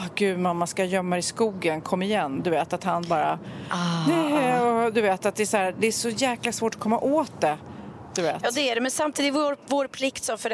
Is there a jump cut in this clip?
no; 0 cuts

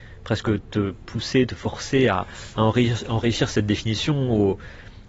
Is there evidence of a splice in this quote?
no; 0 cuts

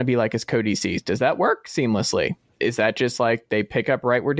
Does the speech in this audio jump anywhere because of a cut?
no; 0 cuts

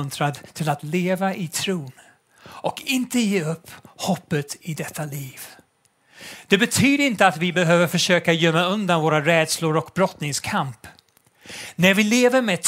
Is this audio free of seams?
yes; 0 cuts

